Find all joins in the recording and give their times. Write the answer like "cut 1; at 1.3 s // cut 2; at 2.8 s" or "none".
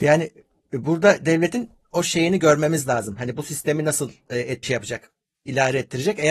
cut 1; at 4.6 s